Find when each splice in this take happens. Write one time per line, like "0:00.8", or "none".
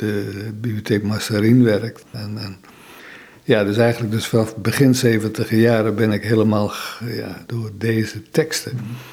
0:02.1
0:07.5